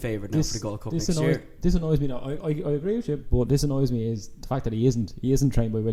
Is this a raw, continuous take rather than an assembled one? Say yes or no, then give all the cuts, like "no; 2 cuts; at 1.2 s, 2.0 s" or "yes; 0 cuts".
yes; 0 cuts